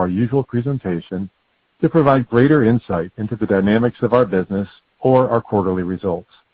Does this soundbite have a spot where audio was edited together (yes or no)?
no